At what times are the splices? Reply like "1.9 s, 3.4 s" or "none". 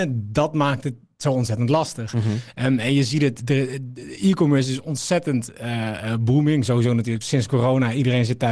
7.2 s